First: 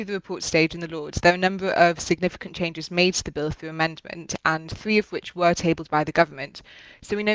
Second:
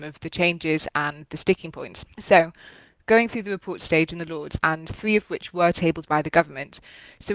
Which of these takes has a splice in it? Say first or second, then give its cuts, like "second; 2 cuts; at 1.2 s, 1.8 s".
second; 2 cuts; at 2.1 s, 4.6 s